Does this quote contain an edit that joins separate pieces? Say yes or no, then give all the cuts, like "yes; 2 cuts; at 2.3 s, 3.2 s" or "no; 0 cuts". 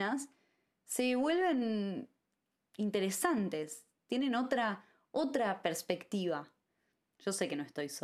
yes; 1 cut; at 7.1 s